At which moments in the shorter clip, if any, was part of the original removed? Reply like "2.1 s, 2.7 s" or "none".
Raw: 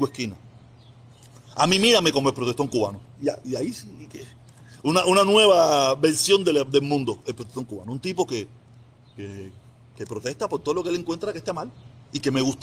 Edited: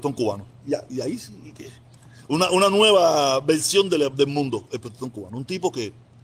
none